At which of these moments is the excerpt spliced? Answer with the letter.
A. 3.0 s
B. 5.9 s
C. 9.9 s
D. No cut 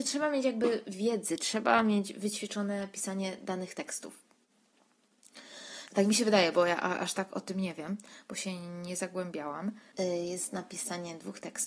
B